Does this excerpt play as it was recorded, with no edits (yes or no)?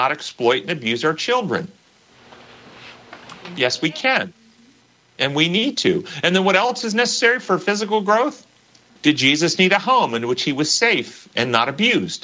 no